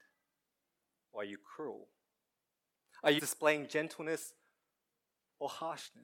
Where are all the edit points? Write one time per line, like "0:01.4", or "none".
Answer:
0:03.2